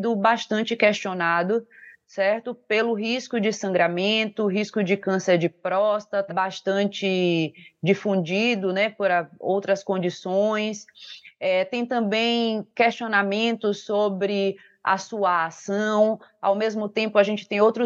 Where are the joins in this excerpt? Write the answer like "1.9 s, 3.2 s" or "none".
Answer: 6.3 s